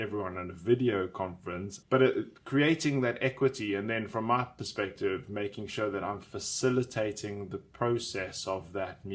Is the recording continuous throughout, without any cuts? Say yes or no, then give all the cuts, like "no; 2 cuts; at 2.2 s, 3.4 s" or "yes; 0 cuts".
no; 1 cut; at 1.8 s